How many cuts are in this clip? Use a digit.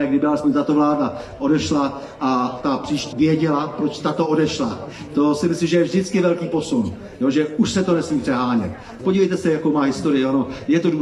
2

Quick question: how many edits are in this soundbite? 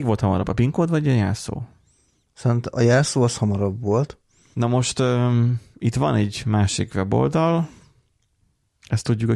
1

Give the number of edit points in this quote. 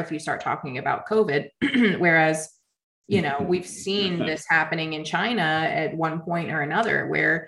0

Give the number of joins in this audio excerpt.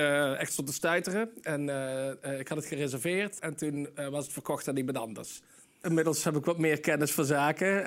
2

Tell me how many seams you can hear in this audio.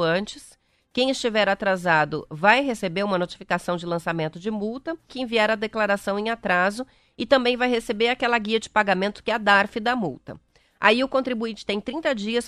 1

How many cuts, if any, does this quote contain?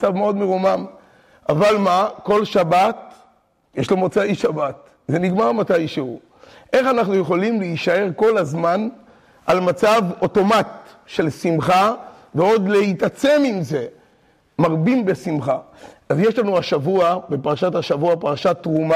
0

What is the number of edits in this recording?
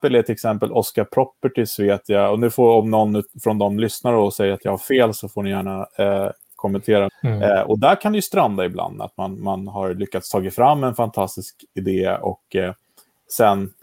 1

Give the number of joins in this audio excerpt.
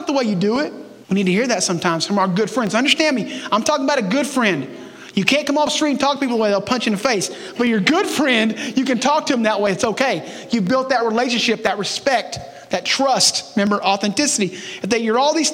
1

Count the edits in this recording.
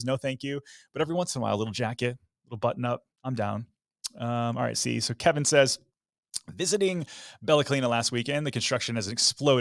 1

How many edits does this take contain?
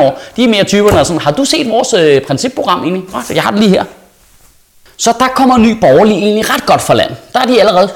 0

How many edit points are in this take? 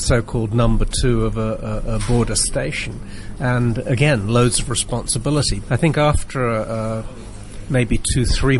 1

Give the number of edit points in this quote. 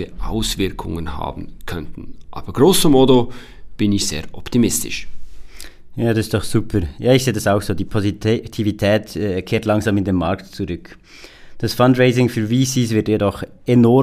0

